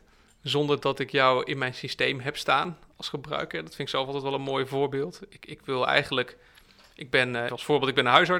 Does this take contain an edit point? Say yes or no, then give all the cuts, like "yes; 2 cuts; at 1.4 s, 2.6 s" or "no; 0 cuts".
yes; 1 cut; at 7.5 s